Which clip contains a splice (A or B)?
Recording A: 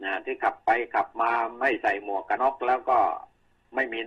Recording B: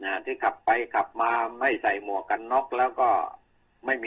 A